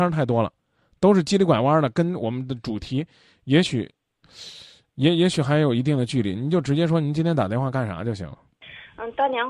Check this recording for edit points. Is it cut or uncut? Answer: uncut